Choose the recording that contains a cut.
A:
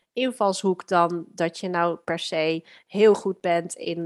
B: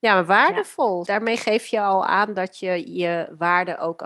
B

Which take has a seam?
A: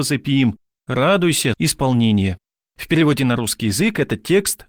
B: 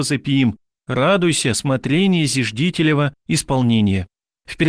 A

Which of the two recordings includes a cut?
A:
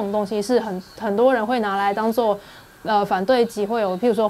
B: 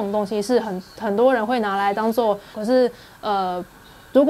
B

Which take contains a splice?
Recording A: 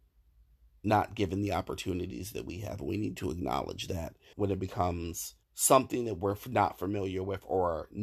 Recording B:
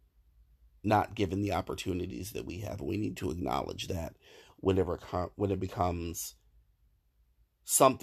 A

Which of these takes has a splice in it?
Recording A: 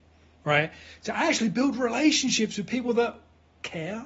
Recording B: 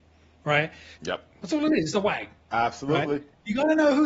B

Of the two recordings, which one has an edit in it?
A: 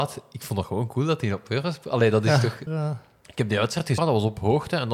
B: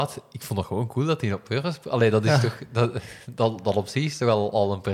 A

